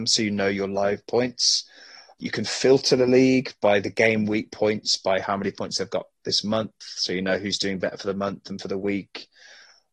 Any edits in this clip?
no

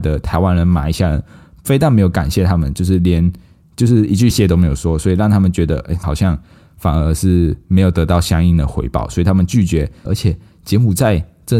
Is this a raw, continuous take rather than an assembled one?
no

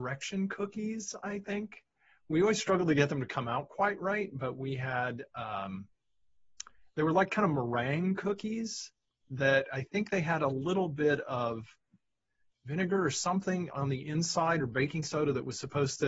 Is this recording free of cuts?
yes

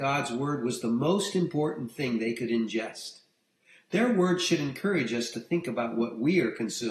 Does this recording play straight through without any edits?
yes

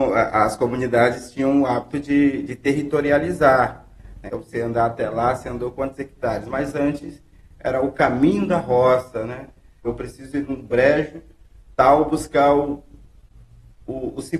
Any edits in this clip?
yes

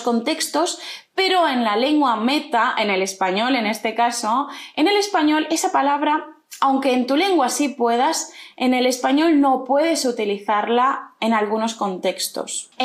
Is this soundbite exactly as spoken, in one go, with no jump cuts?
yes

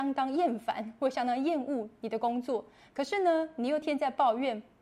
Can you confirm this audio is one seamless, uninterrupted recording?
no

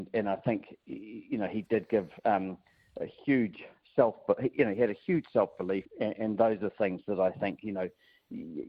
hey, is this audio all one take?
no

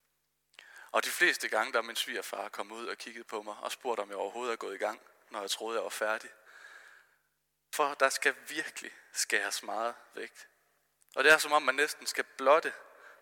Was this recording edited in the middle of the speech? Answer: no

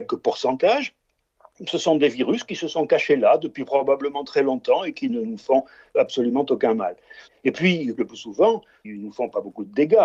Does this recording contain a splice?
yes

